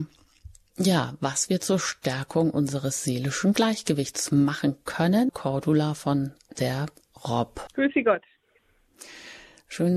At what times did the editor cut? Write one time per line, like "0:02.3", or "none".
0:05.3
0:07.7